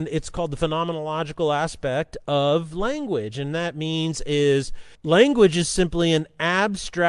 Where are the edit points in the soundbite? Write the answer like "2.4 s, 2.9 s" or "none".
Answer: 5.0 s